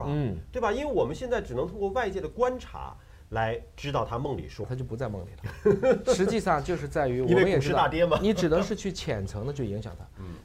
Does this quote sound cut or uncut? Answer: cut